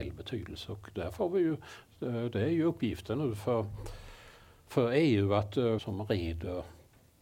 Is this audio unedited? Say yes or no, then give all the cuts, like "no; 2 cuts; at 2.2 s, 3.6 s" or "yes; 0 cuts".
no; 1 cut; at 5.8 s